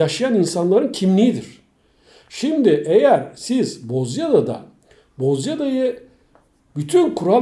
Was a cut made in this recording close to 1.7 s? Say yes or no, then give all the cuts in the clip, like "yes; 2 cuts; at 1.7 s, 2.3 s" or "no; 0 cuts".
no; 0 cuts